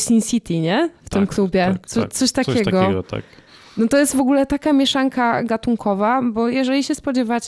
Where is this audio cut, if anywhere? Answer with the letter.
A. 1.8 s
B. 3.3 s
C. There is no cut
C